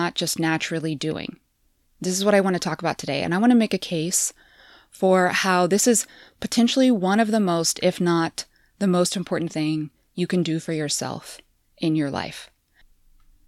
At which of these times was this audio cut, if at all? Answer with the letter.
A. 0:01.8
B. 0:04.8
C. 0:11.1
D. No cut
A